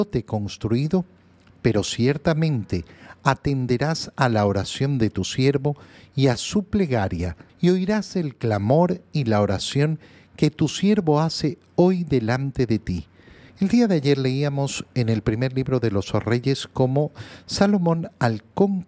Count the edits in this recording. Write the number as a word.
two